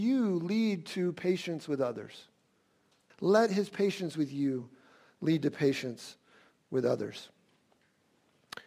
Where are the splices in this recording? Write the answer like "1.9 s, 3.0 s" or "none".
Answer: 3.1 s